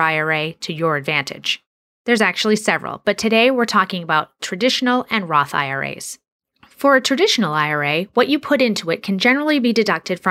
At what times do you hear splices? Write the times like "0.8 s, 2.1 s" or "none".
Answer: 2.0 s